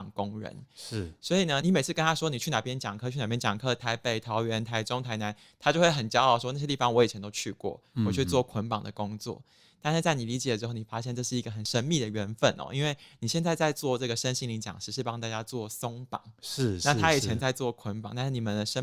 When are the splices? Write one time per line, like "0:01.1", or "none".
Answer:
none